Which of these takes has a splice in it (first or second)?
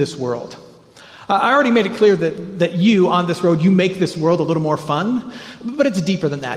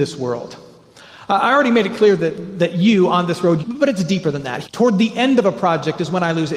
second